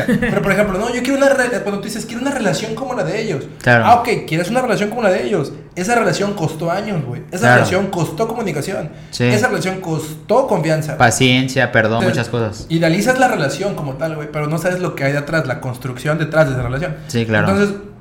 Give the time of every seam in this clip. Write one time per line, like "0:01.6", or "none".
0:12.0